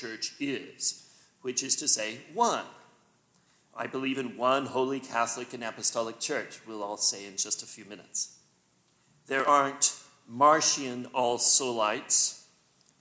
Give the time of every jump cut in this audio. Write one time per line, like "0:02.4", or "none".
none